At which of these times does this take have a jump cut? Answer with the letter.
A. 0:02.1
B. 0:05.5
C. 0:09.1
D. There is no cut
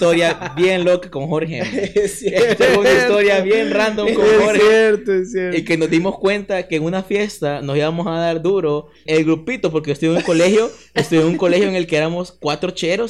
C